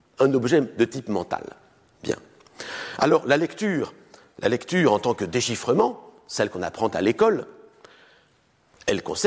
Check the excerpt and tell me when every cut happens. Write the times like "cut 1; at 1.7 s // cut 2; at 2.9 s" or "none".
none

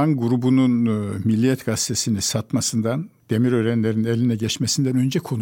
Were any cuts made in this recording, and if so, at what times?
cut 1; at 3.2 s

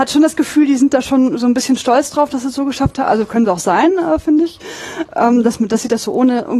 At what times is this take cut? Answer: none

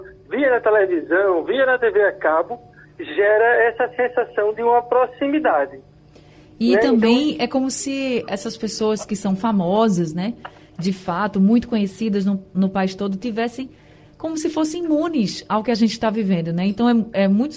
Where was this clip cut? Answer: none

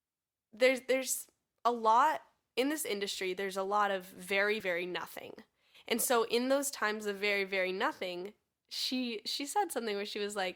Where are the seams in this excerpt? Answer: cut 1; at 4.6 s

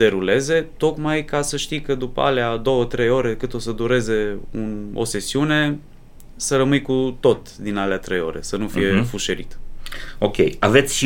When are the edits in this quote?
none

